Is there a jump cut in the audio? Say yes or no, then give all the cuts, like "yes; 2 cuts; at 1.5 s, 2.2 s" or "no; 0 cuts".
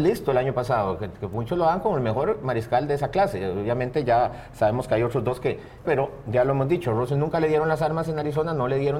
yes; 1 cut; at 5.8 s